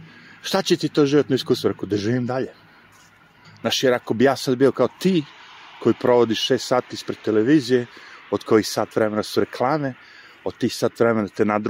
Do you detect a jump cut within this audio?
yes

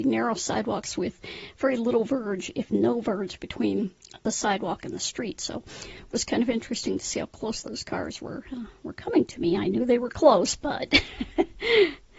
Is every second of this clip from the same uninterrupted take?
yes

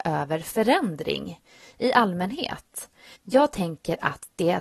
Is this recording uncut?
no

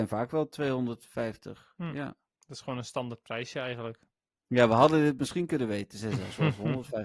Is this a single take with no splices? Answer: yes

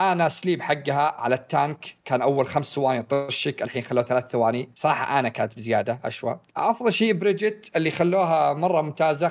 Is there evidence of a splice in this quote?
yes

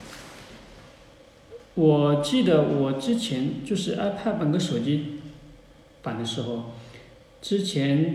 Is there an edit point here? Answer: no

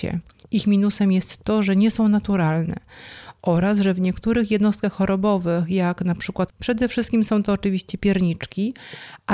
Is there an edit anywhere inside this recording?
yes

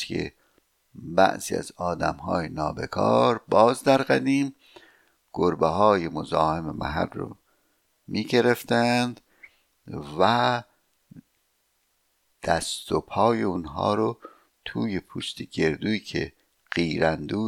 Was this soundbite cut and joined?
no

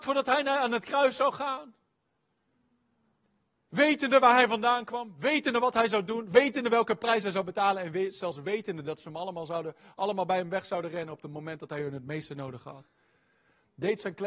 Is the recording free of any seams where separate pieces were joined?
yes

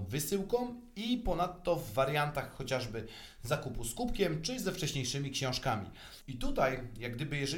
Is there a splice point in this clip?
yes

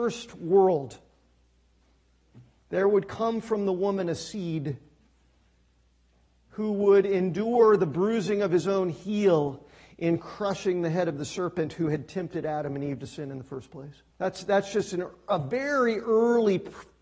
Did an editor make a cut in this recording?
yes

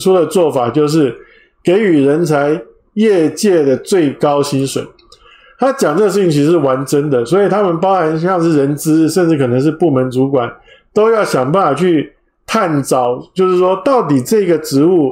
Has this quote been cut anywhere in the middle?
no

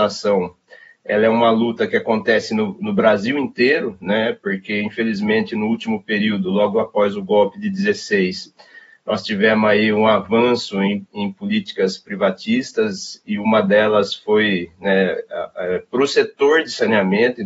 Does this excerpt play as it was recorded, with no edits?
yes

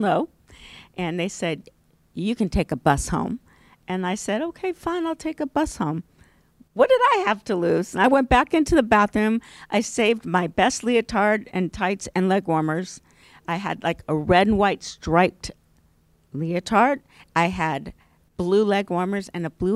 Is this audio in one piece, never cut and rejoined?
yes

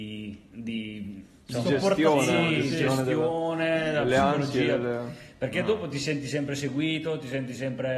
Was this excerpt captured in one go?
yes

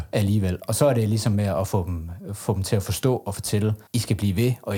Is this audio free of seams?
no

